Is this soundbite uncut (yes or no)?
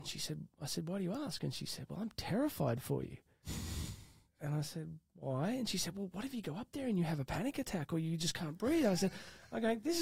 yes